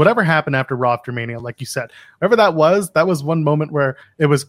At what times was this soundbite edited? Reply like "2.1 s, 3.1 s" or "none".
none

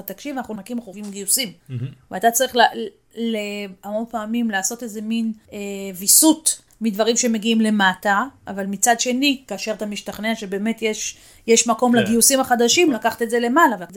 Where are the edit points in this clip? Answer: none

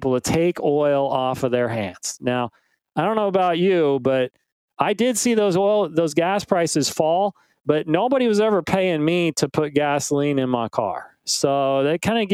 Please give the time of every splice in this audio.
none

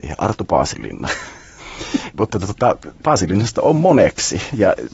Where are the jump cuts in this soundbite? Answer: 2.1 s

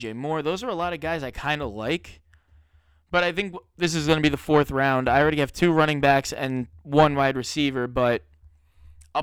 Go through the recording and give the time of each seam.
none

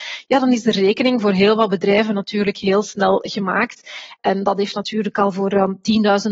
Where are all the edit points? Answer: 4.2 s

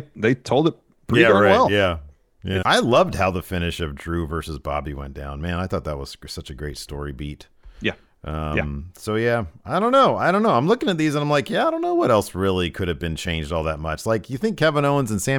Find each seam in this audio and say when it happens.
2.6 s

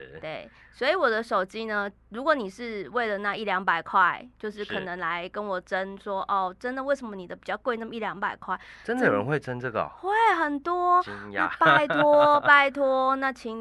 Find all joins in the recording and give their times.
none

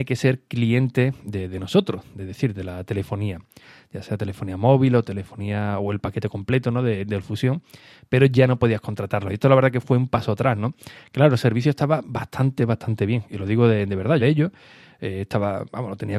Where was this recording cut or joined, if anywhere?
12.6 s, 14.2 s

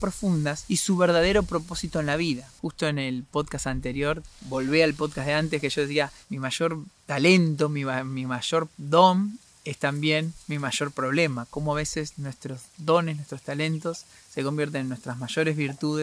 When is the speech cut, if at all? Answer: 2.6 s

